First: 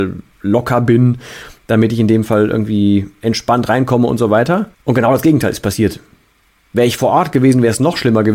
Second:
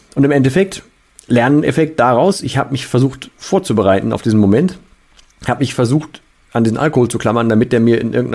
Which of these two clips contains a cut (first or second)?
first